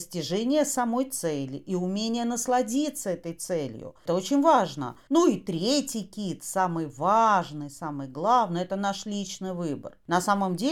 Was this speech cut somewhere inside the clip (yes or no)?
yes